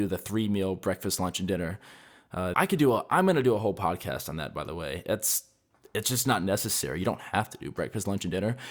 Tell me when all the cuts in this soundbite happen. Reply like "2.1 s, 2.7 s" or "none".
2.5 s